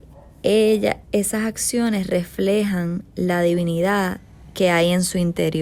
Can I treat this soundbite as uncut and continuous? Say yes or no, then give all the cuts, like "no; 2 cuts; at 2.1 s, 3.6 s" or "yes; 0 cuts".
no; 1 cut; at 1.0 s